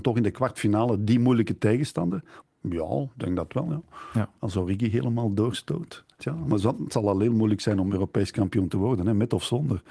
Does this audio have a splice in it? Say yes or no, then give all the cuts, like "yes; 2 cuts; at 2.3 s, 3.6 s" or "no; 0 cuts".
yes; 2 cuts; at 2.4 s, 6.2 s